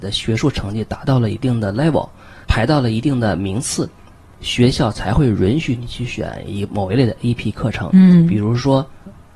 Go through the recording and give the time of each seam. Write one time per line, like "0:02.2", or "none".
none